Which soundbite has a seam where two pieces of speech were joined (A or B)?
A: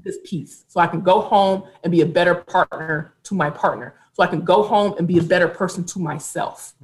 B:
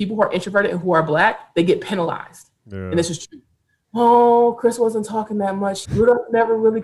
B